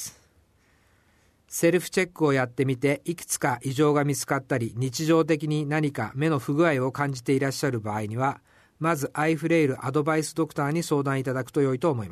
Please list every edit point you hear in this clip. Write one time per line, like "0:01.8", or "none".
none